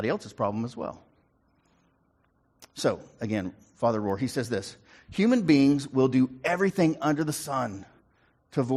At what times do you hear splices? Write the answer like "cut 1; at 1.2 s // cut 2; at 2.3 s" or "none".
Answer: none